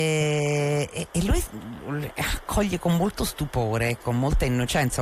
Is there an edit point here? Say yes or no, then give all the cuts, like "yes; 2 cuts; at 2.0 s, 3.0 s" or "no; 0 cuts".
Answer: yes; 1 cut; at 1.1 s